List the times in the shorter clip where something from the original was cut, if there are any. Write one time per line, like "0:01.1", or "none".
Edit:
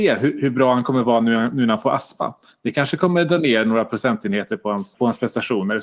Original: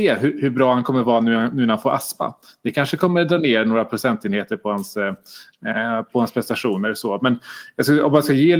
0:04.9